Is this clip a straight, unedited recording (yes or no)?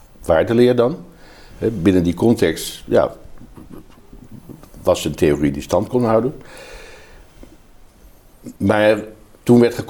no